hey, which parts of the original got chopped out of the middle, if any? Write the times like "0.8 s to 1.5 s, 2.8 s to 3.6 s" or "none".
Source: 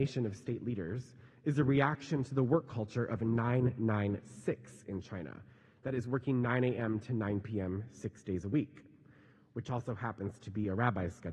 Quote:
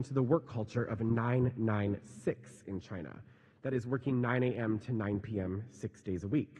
none